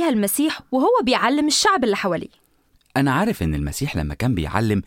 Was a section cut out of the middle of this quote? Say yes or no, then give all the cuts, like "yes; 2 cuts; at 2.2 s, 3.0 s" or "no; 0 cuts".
no; 0 cuts